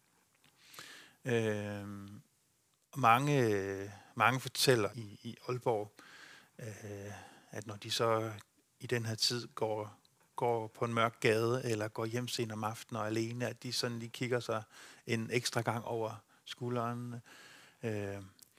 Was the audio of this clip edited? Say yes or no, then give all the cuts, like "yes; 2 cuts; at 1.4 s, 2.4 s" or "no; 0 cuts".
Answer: yes; 1 cut; at 4.9 s